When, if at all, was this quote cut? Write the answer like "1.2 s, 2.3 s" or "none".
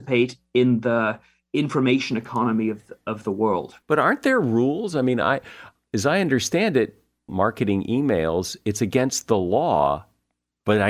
3.8 s, 7.3 s